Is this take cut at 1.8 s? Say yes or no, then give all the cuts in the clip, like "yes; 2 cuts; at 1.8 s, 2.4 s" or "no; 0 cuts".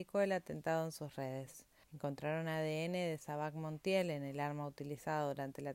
yes; 1 cut; at 1.8 s